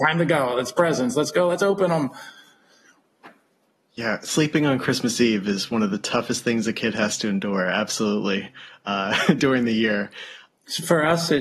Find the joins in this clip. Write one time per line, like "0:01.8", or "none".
0:10.5